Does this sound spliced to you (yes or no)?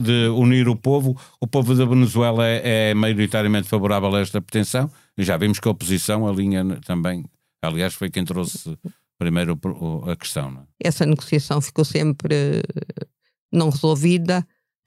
yes